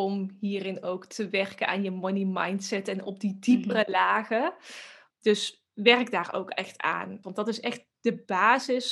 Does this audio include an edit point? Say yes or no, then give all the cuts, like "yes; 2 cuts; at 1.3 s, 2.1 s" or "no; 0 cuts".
yes; 2 cuts; at 5.1 s, 7.2 s